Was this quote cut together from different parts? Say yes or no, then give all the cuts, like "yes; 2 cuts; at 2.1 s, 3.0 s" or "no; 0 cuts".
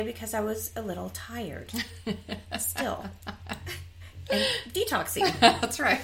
no; 0 cuts